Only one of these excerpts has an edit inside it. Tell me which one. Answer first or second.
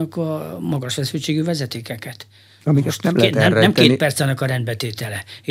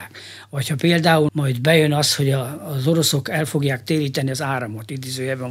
second